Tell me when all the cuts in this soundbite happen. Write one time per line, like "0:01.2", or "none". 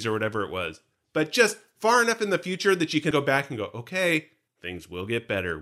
0:03.1

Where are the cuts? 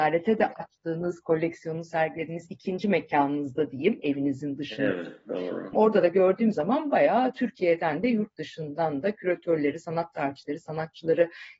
0:05.7

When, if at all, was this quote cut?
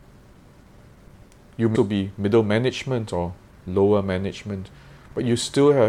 0:01.7

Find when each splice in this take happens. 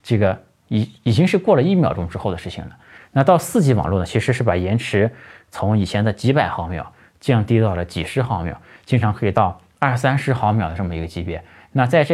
0:03.0

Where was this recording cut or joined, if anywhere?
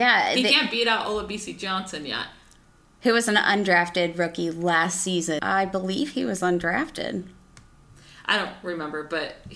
0:05.4

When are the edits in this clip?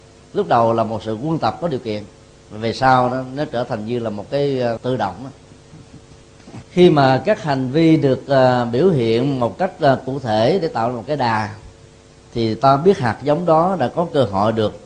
0:04.8
0:06.7

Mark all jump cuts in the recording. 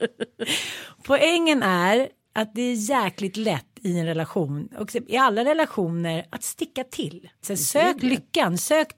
0:07.4

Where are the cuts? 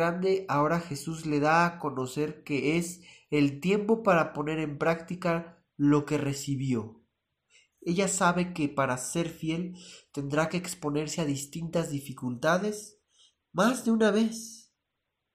0:07.7

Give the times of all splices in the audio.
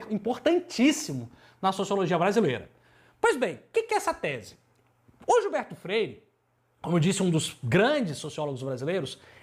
none

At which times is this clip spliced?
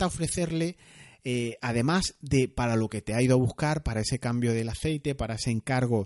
none

